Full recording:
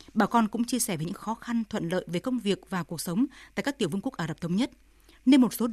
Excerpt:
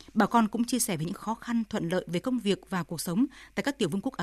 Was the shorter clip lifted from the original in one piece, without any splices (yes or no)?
yes